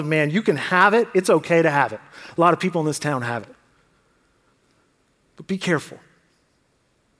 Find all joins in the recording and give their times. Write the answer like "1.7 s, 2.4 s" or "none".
none